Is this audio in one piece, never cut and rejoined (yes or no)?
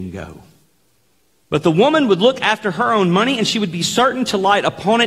no